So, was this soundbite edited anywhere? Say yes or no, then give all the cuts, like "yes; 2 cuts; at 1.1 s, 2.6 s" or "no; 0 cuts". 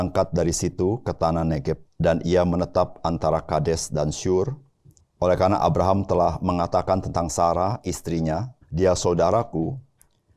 yes; 3 cuts; at 1.9 s, 5.0 s, 8.6 s